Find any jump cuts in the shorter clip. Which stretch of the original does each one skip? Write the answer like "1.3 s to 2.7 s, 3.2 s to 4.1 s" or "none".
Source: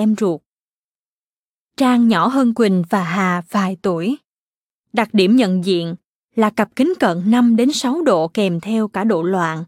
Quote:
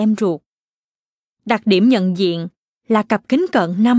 1.3 s to 4.8 s